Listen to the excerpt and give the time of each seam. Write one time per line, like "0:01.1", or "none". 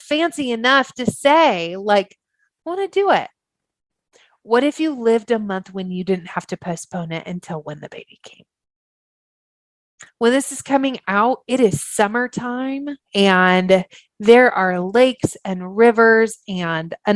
0:10.1
0:13.0